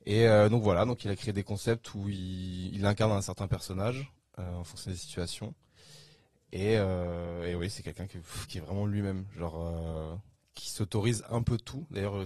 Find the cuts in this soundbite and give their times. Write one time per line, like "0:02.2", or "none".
none